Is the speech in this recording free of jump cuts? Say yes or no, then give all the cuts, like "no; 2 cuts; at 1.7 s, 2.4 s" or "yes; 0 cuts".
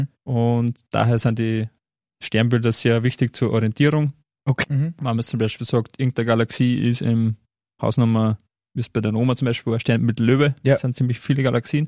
no; 1 cut; at 4.6 s